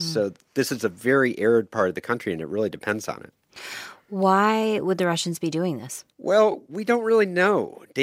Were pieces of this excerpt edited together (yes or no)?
yes